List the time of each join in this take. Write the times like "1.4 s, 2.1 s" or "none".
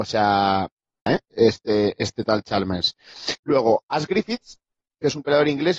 1.1 s